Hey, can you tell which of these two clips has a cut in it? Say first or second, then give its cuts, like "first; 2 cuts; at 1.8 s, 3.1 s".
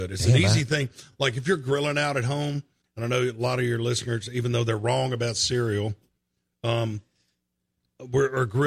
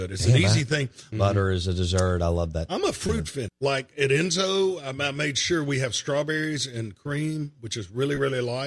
second; 2 cuts; at 1.1 s, 3.5 s